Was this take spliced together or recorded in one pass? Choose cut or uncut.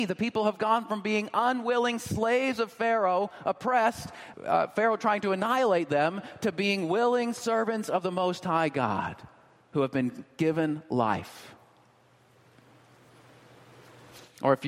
cut